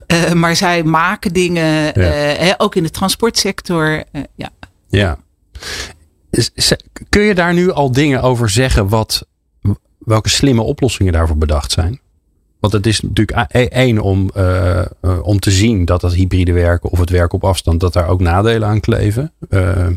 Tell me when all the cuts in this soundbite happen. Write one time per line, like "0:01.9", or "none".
none